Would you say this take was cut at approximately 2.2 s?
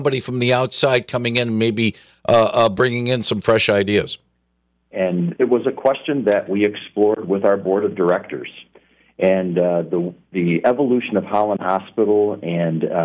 no; 1 cut; at 4.9 s

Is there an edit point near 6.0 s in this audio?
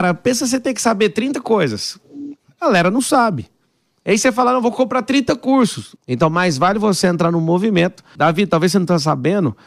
yes; 2 cuts; at 6.0 s, 8.2 s

